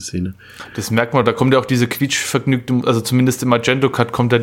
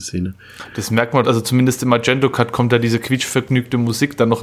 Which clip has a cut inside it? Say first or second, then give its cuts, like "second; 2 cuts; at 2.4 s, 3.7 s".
second; 1 cut; at 1.2 s